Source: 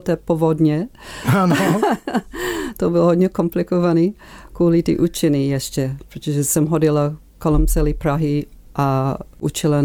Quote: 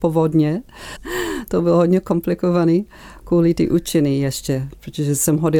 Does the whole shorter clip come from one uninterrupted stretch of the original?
no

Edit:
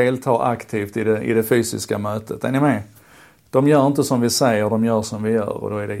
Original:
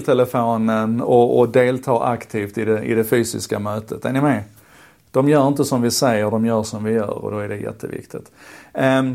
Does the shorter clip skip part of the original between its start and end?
no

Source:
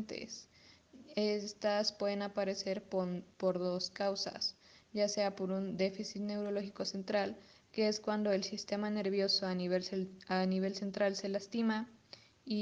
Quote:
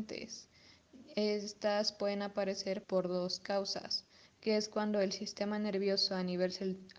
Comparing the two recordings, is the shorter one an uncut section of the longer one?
no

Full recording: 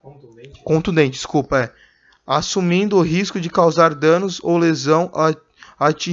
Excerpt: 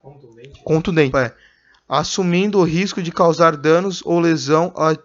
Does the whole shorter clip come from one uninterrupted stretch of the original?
no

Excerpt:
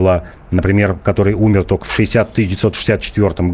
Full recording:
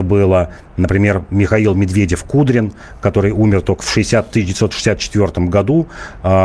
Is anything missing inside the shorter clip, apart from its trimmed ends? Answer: yes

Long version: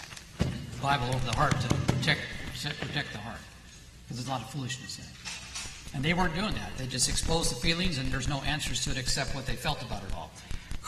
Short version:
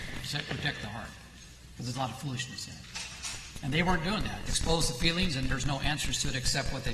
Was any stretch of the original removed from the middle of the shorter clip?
yes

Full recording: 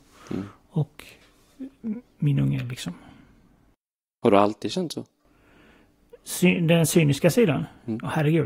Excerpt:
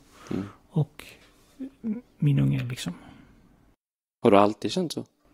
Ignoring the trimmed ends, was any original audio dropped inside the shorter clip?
no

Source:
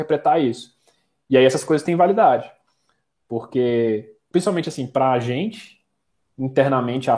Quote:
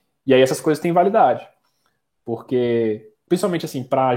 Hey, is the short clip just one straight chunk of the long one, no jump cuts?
yes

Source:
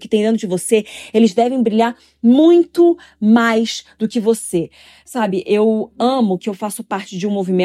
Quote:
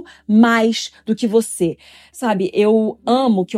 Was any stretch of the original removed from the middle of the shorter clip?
no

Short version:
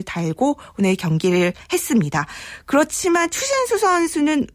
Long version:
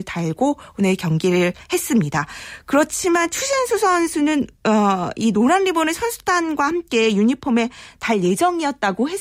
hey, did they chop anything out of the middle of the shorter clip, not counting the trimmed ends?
no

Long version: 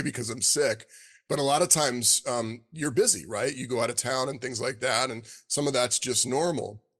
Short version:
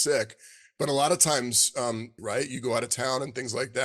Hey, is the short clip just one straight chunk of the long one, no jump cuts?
no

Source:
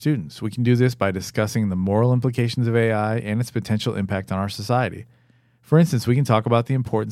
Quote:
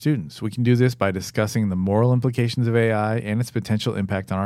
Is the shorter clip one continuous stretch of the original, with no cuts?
yes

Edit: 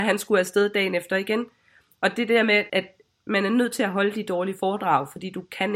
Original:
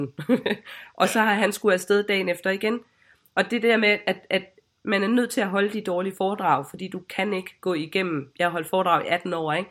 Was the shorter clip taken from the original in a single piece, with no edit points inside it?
no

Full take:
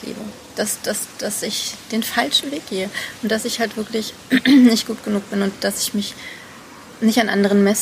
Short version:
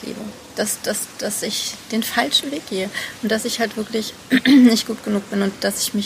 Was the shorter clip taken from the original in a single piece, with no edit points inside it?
yes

